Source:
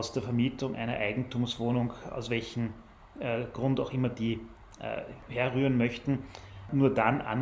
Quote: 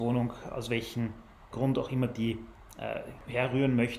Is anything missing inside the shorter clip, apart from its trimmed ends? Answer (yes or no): yes